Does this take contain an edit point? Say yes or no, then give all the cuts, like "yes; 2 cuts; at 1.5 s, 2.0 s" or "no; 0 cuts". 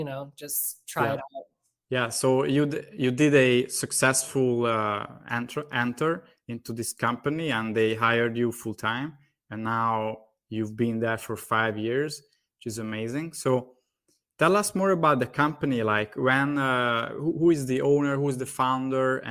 no; 0 cuts